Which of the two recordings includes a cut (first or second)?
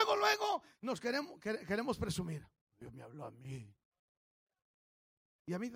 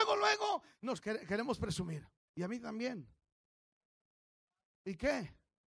second